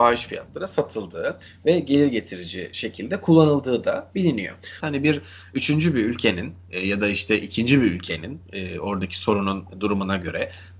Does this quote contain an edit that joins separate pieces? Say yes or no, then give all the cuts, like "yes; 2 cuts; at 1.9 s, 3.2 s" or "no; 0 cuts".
yes; 1 cut; at 4.8 s